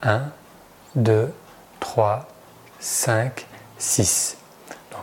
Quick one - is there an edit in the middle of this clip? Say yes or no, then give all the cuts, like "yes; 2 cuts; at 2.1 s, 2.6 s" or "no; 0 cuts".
yes; 1 cut; at 2.7 s